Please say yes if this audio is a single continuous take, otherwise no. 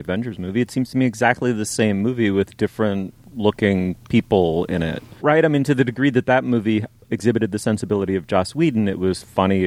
yes